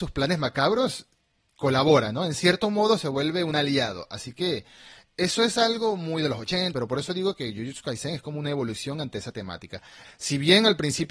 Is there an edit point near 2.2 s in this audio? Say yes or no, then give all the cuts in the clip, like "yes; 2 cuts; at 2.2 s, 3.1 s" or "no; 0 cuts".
no; 2 cuts; at 6.7 s, 10.0 s